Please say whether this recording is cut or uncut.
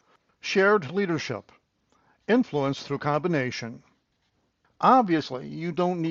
cut